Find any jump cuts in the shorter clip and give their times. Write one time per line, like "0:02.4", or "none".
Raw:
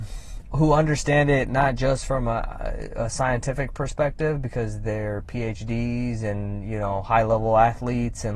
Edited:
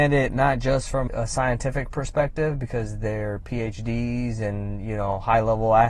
0:01.1

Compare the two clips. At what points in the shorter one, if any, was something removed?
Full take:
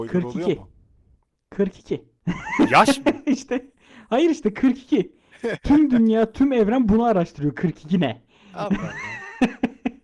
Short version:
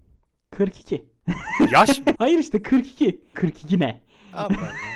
0:02.1
0:03.3

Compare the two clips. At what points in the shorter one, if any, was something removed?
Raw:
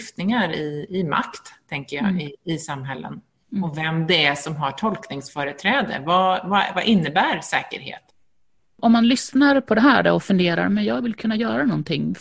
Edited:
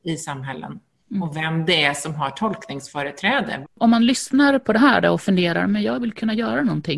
0:03.6

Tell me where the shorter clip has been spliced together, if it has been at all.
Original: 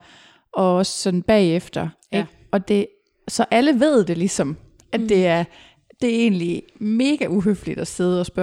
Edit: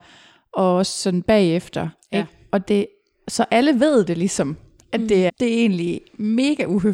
0:05.3

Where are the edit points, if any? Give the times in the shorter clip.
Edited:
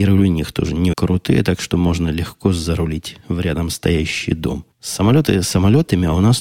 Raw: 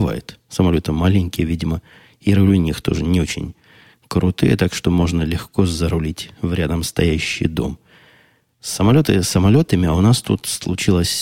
0:00.9
0:04.7

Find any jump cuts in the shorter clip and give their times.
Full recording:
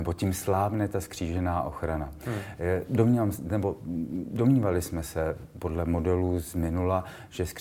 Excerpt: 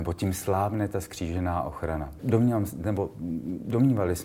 0:02.2

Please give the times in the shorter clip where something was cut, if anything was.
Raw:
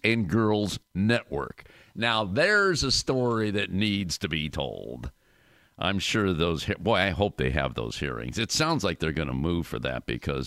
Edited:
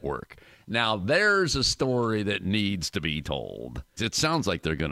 0:04.0

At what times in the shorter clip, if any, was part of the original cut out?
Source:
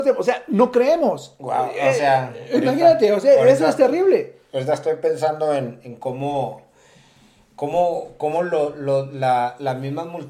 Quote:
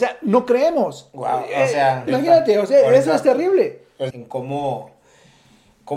0:02.1
0:04.1

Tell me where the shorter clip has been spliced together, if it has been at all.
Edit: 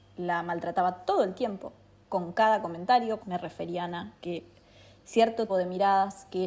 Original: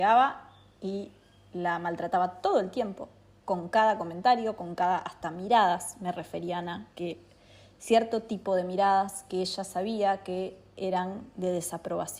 0:03.2
0:05.5

